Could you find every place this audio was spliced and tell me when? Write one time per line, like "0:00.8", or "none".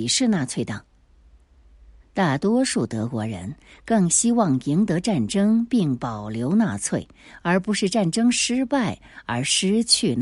0:02.0